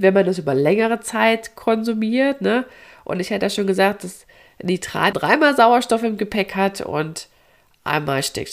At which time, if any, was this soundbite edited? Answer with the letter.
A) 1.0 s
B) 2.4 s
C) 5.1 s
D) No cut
C